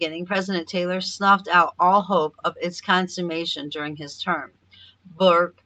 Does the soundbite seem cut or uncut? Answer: uncut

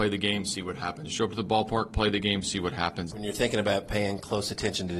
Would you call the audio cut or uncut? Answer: cut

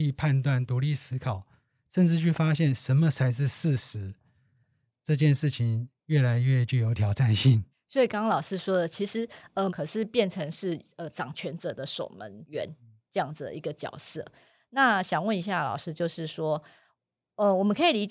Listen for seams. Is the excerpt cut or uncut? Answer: cut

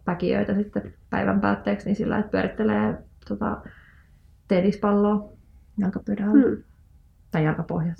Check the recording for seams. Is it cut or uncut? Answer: uncut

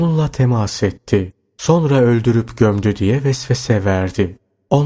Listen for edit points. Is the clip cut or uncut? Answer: uncut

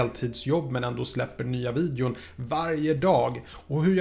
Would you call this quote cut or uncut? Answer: uncut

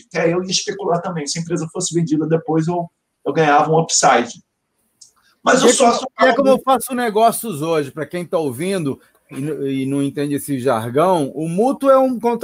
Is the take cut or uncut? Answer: uncut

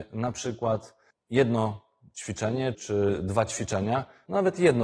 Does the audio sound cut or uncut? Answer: cut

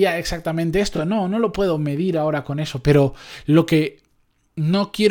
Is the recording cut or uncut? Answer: uncut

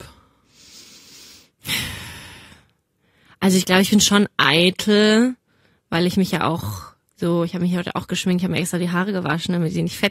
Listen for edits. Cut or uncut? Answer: uncut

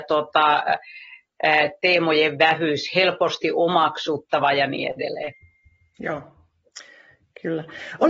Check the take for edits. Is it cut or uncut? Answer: uncut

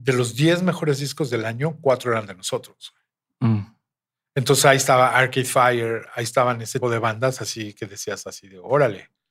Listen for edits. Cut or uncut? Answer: cut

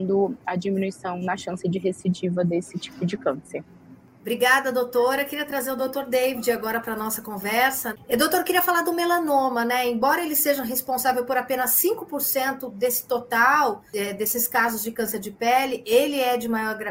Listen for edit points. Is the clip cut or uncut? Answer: uncut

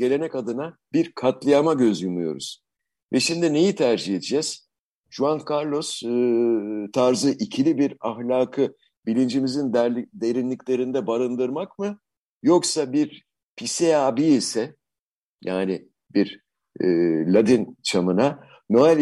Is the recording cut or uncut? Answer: uncut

